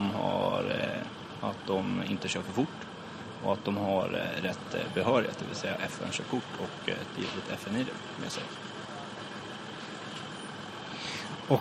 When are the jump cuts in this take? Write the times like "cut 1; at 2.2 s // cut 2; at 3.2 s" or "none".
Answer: cut 1; at 1.4 s